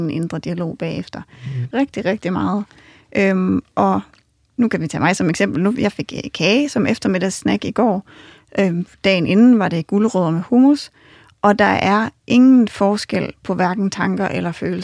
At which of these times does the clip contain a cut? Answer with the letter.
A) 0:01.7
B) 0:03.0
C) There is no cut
A